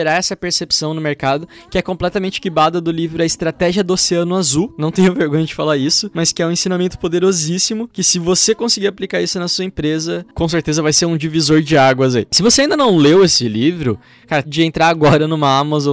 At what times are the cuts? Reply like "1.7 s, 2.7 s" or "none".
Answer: 14.4 s